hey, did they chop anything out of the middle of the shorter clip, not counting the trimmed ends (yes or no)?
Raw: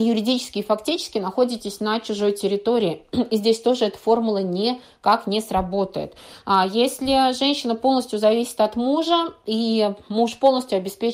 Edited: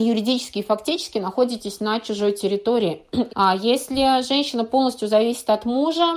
yes